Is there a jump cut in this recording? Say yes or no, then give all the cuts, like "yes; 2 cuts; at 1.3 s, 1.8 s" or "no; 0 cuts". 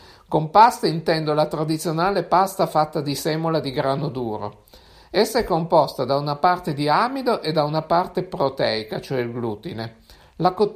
no; 0 cuts